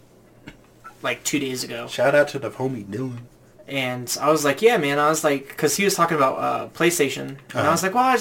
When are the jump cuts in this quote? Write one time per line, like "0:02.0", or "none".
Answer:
none